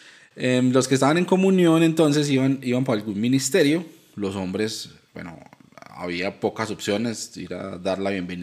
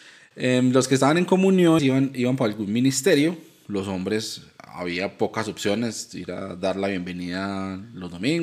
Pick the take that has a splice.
second; 2 cuts; at 1.8 s, 4.6 s

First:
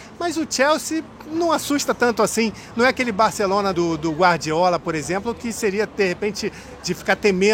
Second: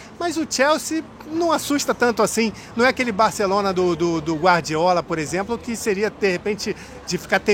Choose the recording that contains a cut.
first; 1 cut; at 3.7 s

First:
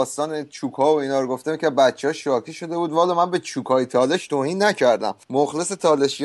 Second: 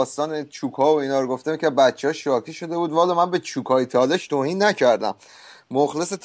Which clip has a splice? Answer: first; 1 cut; at 5.2 s

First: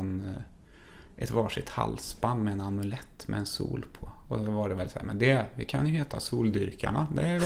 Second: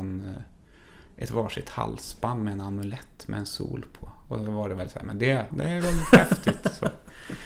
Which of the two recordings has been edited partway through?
second; 1 cut; at 5.5 s

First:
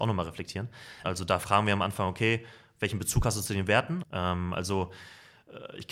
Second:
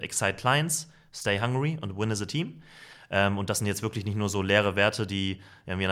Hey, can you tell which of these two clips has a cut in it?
first; 2 cuts; at 1.0 s, 4.0 s

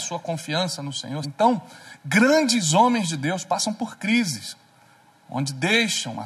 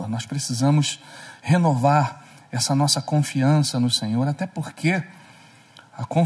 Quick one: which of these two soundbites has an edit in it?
first; 1 cut; at 1.2 s

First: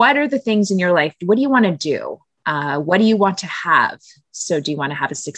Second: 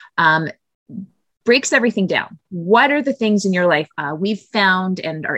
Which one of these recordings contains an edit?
second; 1 cut; at 3.9 s

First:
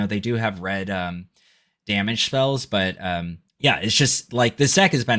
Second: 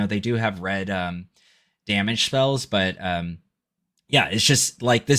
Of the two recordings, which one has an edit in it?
first; 1 cut; at 3.5 s

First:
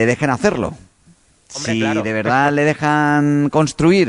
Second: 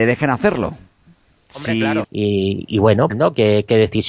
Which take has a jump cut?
second; 2 cuts; at 2.0 s, 3.1 s

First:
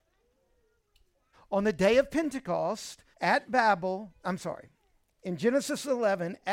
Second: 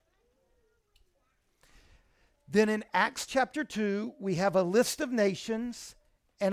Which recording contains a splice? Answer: first; 2 cuts; at 1.3 s, 3.1 s

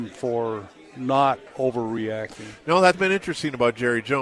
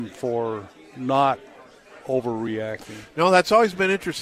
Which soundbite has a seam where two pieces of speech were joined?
first; 2 cuts; at 1.5 s, 2.9 s

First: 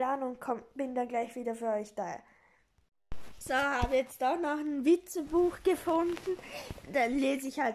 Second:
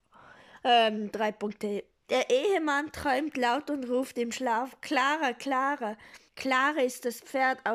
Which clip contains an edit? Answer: second; 2 cuts; at 2.0 s, 6.3 s

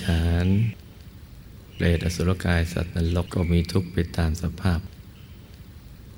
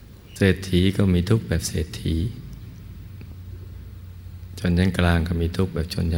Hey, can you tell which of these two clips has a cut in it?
first; 1 cut; at 3.3 s

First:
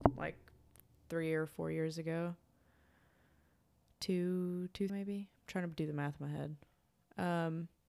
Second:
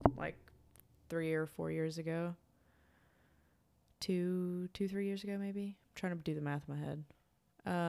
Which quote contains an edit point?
first; 1 cut; at 4.9 s

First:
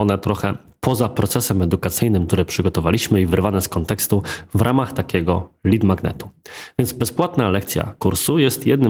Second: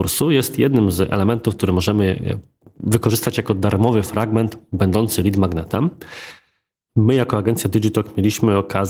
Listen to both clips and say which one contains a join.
second; 1 cut; at 6.9 s

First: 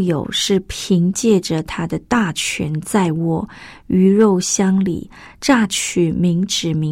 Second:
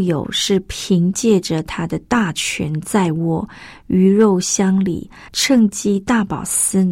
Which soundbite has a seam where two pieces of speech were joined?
second; 1 cut; at 5.3 s

